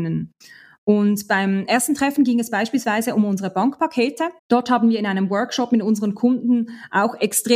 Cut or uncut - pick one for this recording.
cut